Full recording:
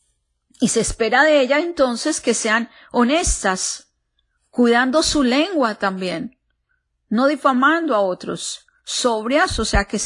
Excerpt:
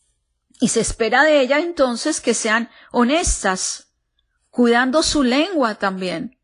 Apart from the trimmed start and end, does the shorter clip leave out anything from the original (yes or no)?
no